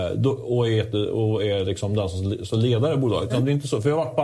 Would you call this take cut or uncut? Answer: cut